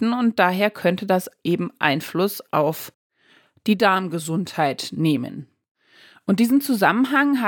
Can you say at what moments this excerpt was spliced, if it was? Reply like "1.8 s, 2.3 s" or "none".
none